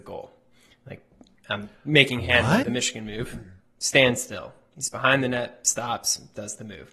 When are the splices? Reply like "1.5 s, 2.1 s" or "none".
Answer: 2.6 s